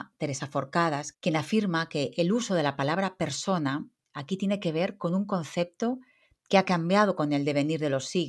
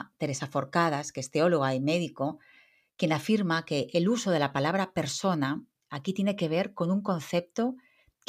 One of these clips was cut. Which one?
first; 1 cut; at 1.1 s

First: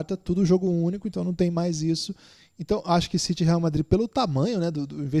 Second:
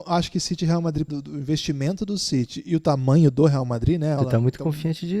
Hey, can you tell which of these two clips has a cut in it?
second; 2 cuts; at 1.1 s, 4.2 s

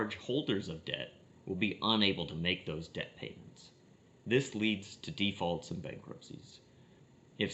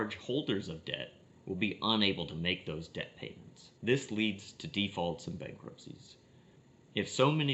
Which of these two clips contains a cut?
second; 1 cut; at 3.8 s

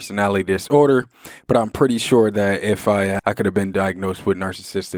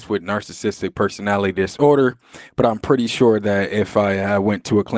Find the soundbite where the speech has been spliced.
first; 1 cut; at 3.2 s

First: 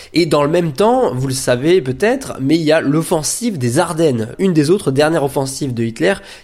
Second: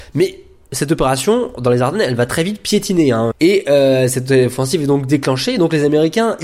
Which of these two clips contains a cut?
second; 1 cut; at 3.3 s

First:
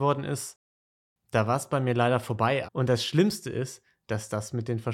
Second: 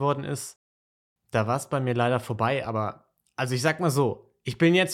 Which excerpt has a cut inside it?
first; 1 cut; at 2.7 s

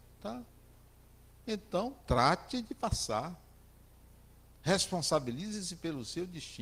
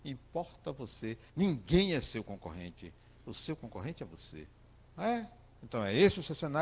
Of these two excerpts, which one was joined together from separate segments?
second; 2 cuts; at 1.3 s, 4.9 s

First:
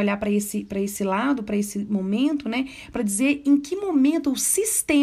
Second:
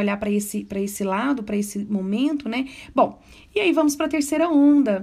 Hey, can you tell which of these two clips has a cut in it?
second; 1 cut; at 2.9 s

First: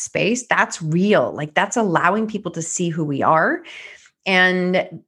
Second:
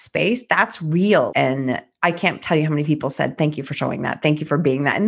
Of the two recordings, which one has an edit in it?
second; 1 cut; at 1.3 s

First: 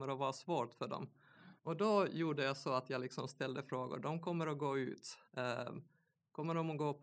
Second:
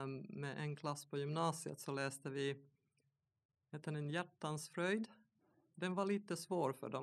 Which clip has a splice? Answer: first; 2 cuts; at 1.6 s, 5.3 s

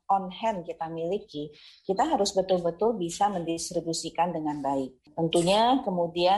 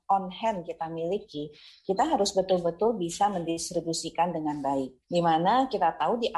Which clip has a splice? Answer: second; 1 cut; at 5.0 s

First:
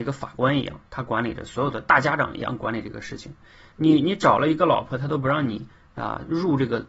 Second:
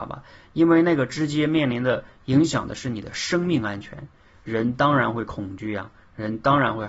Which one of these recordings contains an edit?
first; 1 cut; at 3.7 s

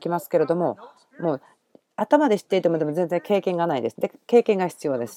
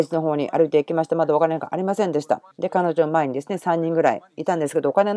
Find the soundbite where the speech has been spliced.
second; 1 cut; at 2.5 s

